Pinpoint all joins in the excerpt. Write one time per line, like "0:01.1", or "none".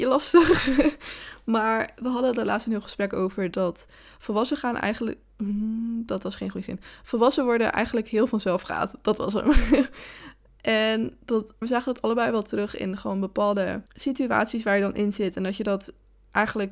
0:11.6
0:13.9